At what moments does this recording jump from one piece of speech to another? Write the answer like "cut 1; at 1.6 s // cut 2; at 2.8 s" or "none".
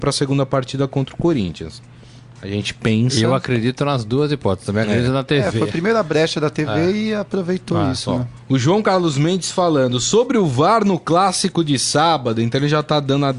none